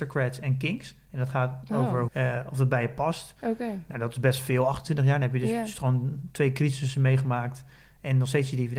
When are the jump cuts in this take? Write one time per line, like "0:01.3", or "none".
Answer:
0:02.1
0:03.4

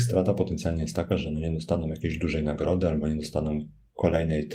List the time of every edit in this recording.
none

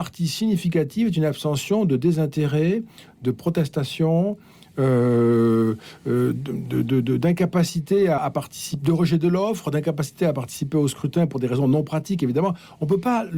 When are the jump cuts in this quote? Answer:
0:08.2

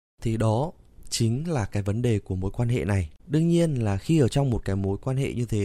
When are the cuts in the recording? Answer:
0:03.2

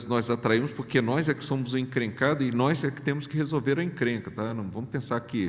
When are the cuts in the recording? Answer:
none

